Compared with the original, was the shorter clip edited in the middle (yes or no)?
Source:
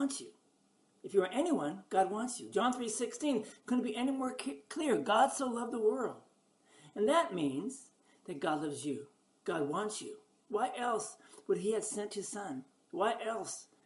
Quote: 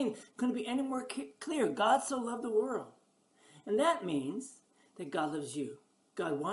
no